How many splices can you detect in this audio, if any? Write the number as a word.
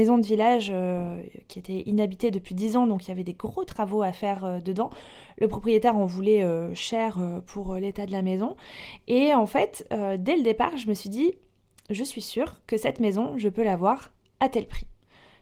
zero